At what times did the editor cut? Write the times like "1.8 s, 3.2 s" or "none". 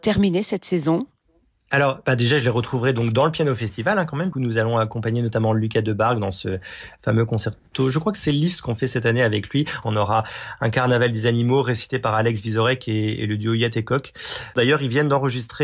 4.3 s, 9.8 s

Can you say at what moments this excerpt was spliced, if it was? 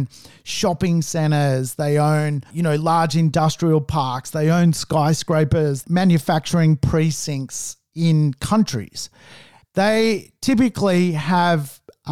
2.5 s, 5.8 s, 9.6 s

